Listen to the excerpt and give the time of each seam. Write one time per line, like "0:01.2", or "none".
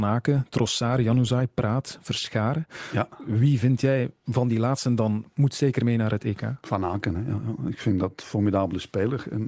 none